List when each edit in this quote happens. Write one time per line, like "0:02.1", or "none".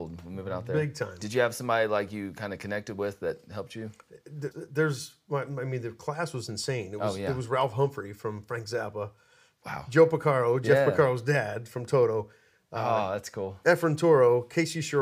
0:04.5

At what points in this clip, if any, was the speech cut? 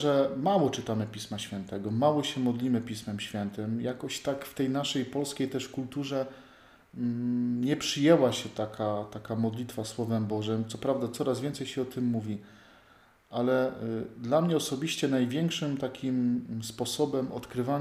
none

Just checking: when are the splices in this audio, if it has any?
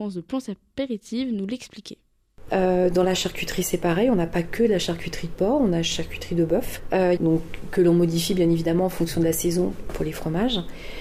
0:02.5
0:07.2
0:09.9

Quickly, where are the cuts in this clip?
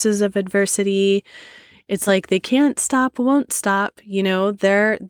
none

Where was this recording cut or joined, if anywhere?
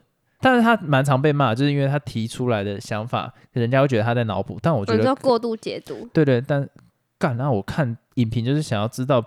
none

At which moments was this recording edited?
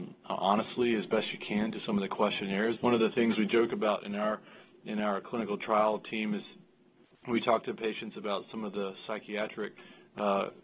0:02.8

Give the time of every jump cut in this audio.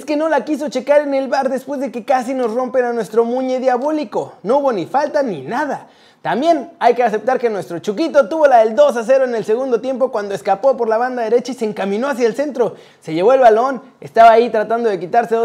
0:05.2

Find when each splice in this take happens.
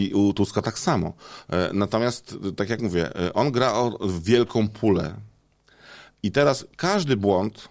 0:06.7

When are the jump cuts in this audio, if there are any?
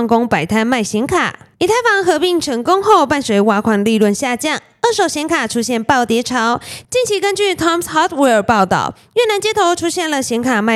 0:01.5

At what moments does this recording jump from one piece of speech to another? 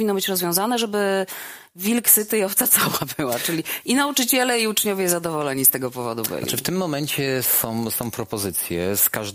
none

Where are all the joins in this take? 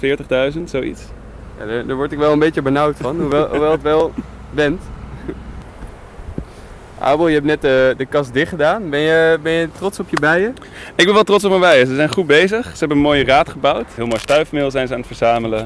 none

